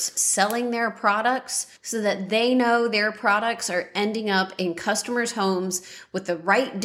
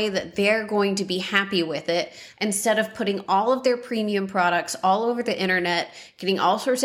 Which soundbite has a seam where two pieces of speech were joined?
first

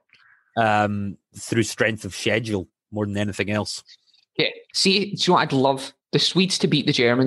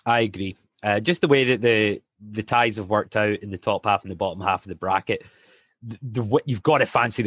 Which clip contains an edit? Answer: first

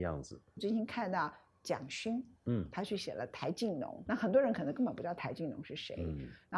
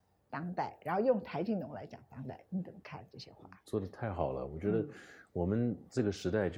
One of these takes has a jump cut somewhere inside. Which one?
first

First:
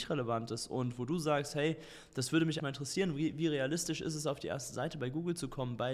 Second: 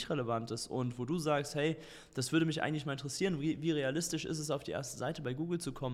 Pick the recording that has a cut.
first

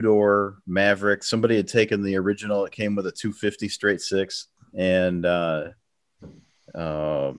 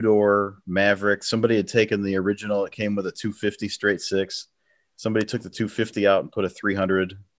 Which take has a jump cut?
first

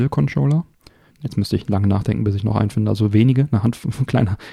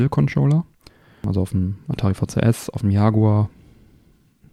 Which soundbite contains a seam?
first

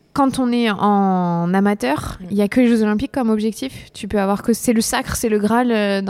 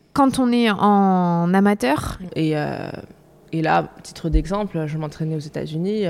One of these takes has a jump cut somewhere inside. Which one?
second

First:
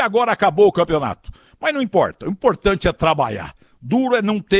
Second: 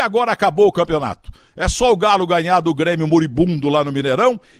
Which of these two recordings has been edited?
first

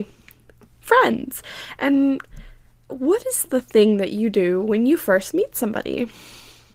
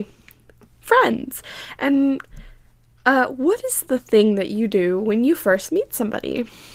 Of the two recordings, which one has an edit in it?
first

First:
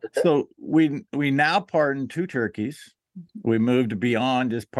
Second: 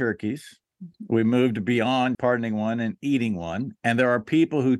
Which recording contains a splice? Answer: second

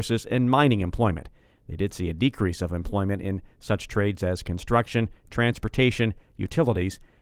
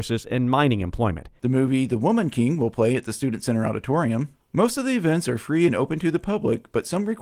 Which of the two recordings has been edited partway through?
second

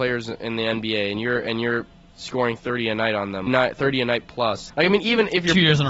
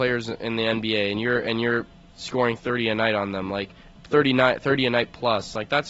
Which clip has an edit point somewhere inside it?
first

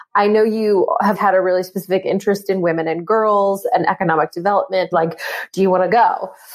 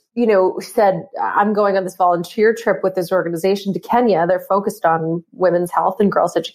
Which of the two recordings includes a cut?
first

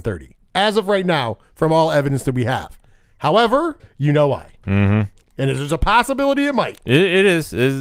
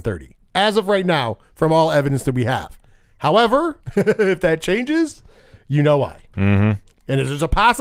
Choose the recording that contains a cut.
first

